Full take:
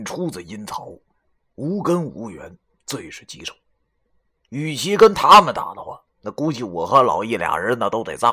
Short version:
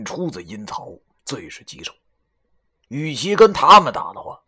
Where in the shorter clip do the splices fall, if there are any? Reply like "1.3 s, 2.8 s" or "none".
1.2 s